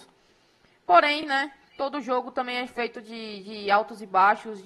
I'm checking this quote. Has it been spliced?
no; 0 cuts

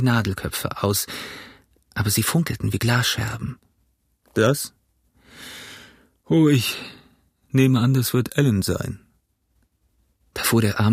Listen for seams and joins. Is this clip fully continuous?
yes; 0 cuts

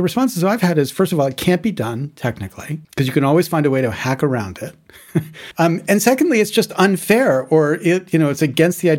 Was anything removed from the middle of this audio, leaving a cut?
yes; 2 cuts; at 2.8 s, 5.5 s

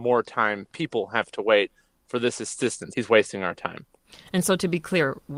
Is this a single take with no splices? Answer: no; 1 cut; at 2.9 s

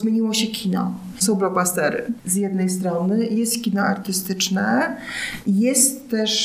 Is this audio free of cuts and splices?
no; 1 cut; at 1.1 s

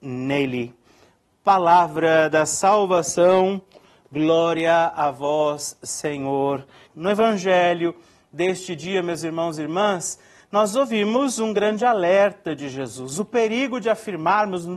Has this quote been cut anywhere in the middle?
yes; 1 cut; at 6.9 s

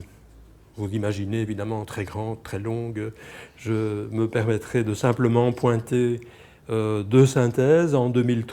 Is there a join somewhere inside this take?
no; 0 cuts

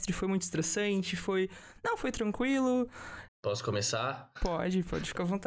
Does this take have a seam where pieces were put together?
yes; 1 cut; at 3.3 s

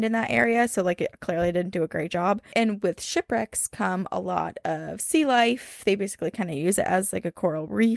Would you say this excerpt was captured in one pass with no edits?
yes; 0 cuts

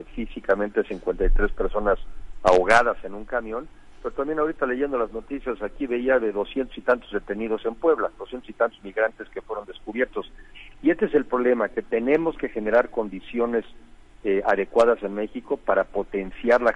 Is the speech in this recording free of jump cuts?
yes; 0 cuts

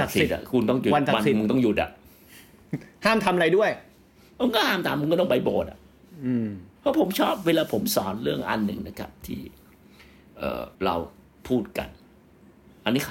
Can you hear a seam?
yes; 2 cuts; at 6.8 s, 10.7 s

